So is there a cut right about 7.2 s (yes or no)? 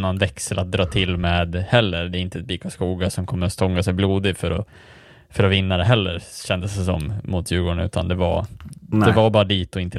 no